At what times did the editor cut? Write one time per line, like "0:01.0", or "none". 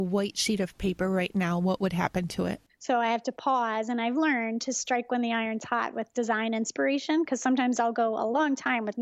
0:02.7